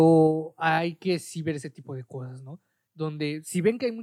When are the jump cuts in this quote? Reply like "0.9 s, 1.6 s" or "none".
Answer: none